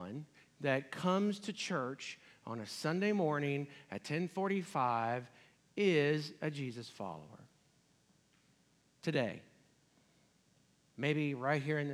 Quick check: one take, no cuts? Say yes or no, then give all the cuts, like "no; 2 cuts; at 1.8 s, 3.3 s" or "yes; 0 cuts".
yes; 0 cuts